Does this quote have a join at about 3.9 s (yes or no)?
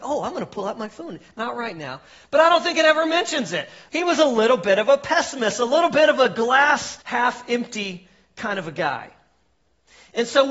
yes